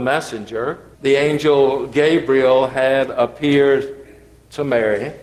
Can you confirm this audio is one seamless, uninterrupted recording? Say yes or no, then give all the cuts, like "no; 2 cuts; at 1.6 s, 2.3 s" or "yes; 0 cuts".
no; 1 cut; at 1.0 s